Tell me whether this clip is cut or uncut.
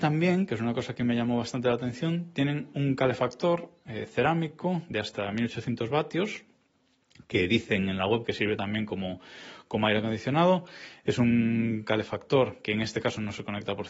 uncut